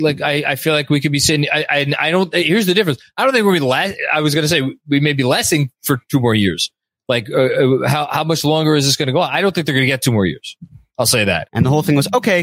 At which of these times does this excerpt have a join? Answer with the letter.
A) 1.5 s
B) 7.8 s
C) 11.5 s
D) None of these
C